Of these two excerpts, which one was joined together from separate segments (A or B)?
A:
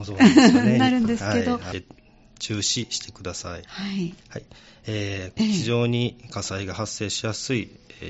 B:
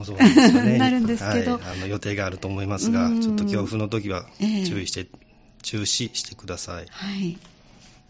A